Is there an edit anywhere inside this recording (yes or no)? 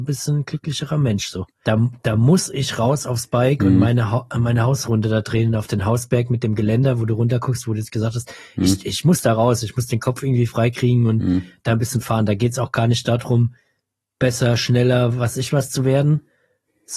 yes